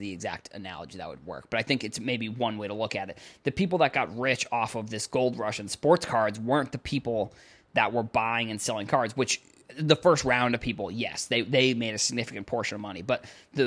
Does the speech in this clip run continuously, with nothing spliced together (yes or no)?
yes